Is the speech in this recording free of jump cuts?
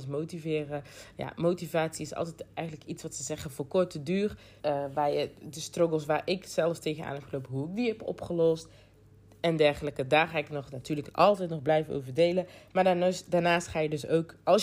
no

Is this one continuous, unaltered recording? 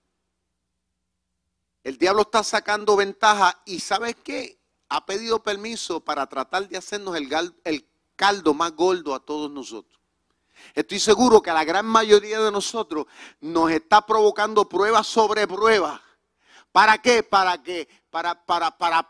yes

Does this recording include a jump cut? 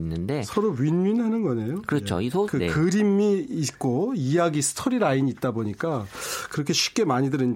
yes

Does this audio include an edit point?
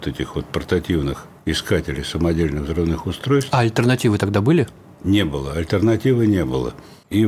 no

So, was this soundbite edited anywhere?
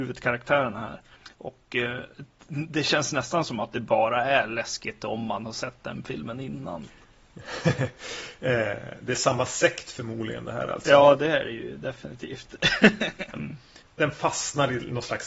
yes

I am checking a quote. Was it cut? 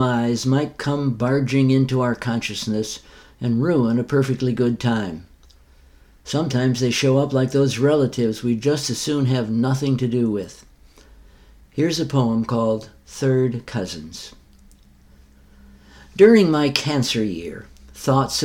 no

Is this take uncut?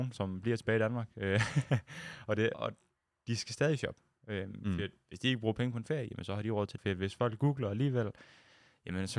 no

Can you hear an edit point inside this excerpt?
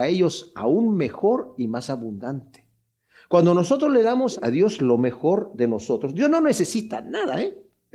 no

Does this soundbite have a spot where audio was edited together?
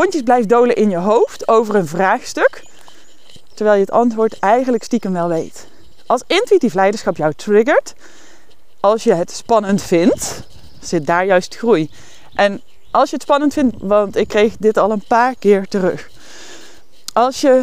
yes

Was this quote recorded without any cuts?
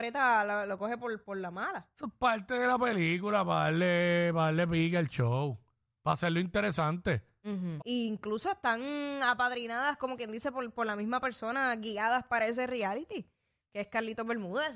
no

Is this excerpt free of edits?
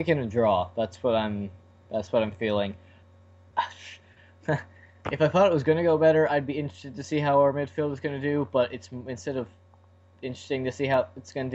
no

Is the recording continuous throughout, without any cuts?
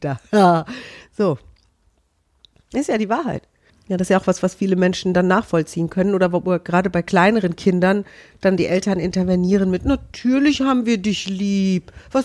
no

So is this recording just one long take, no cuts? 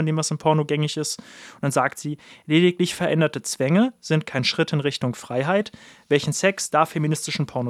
yes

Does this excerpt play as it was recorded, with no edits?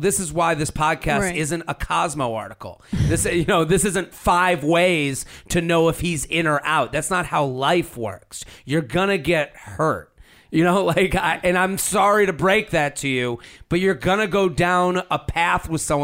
yes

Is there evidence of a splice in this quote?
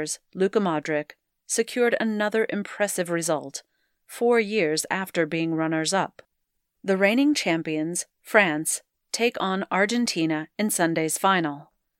no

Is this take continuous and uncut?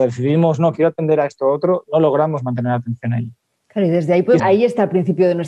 no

